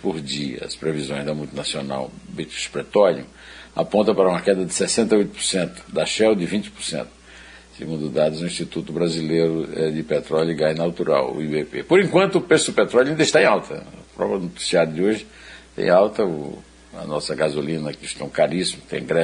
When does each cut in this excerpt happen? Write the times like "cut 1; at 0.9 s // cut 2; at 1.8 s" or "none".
cut 1; at 18.0 s